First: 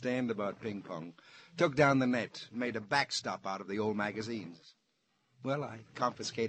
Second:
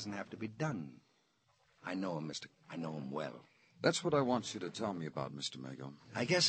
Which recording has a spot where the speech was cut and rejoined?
second; 1 cut; at 2.5 s

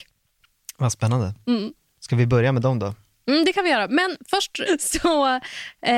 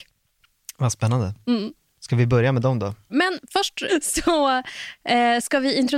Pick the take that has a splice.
second; 1 cut; at 3.1 s

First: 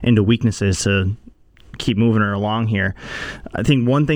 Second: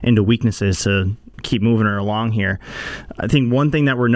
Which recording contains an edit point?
second; 1 cut; at 1.3 s

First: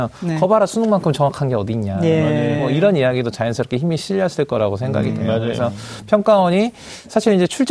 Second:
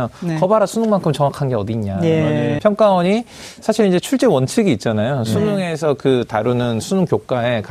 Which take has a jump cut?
second; 1 cut; at 2.6 s

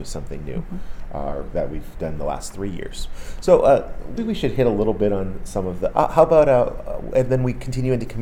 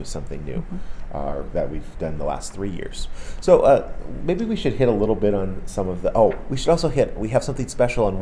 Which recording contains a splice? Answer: first; 2 cuts; at 4.2 s, 5.9 s

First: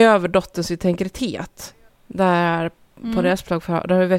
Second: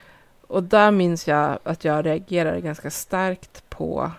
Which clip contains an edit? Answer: first; 1 cut; at 1.9 s

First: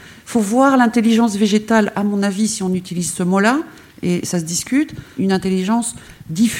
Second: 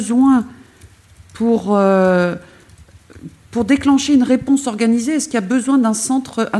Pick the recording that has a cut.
first; 1 cut; at 5.2 s

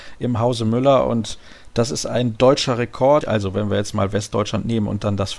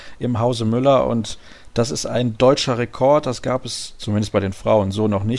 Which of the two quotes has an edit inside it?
first; 1 cut; at 3.2 s

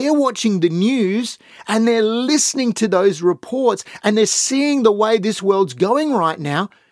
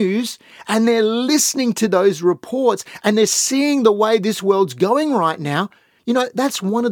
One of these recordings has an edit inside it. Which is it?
second; 1 cut; at 6.0 s

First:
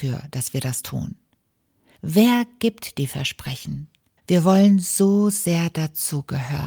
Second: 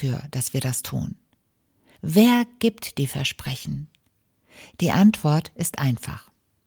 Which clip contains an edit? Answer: first; 1 cut; at 4.2 s

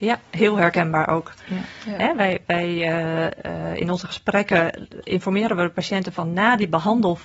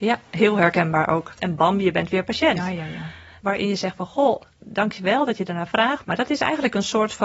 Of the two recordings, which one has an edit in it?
second; 3 cuts; at 1.4 s, 3.4 s, 6.0 s

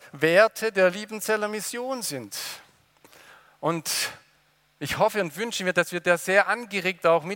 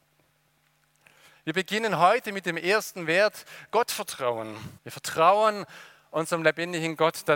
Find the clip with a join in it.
second; 1 cut; at 4.8 s

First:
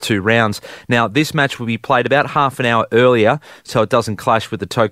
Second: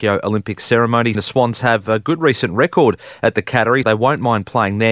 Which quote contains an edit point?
second; 2 cuts; at 1.1 s, 3.8 s

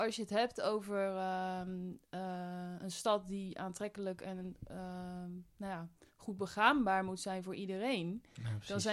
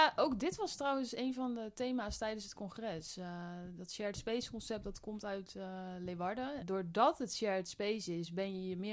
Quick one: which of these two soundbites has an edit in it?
second; 1 cut; at 6.6 s

